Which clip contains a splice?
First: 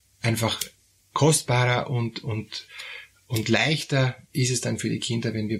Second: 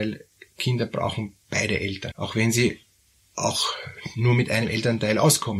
second; 1 cut; at 2.1 s

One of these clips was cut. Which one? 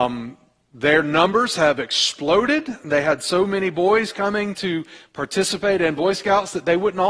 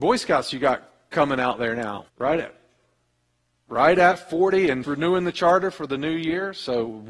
second; 2 cuts; at 2.1 s, 4.8 s

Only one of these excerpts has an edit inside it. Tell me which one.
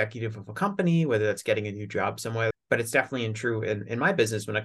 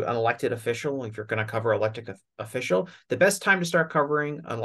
first; 1 cut; at 2.5 s

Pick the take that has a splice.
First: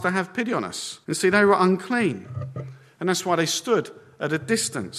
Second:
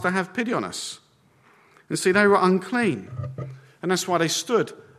first; 1 cut; at 1.0 s

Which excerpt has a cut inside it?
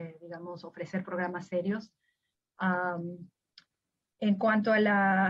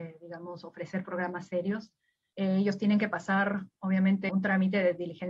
second; 2 cuts; at 2.3 s, 4.3 s

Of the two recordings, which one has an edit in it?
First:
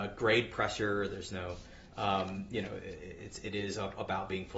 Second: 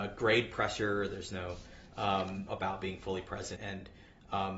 second; 2 cuts; at 2.5 s, 3.6 s

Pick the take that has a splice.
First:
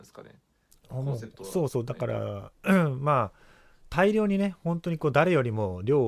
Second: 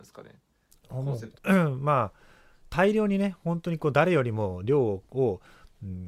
second; 1 cut; at 1.4 s

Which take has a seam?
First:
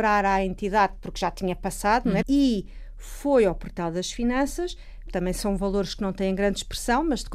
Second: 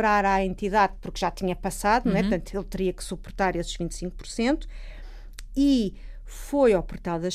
first; 2 cuts; at 2.2 s, 5.1 s

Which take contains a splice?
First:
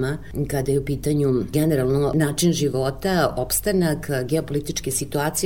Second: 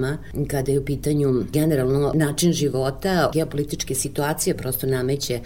second; 1 cut; at 3.3 s

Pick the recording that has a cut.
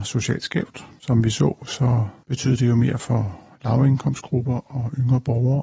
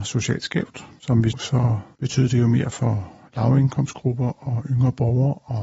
second; 1 cut; at 1.3 s

